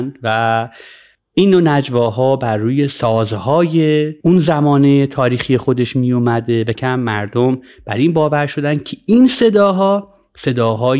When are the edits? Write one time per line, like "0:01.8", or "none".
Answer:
0:06.7